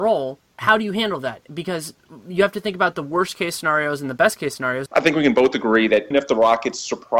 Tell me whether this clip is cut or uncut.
cut